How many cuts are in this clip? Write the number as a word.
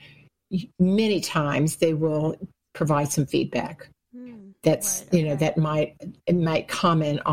zero